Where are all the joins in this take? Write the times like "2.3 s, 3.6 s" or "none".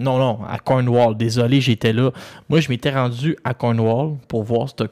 none